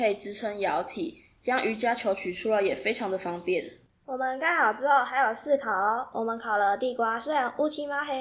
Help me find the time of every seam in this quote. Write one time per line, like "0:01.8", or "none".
0:03.9